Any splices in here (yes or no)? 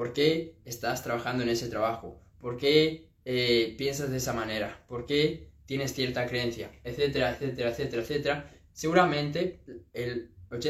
no